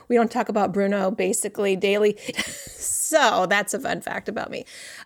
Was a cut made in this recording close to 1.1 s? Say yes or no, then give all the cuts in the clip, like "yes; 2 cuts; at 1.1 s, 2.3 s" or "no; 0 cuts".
no; 1 cut; at 2.3 s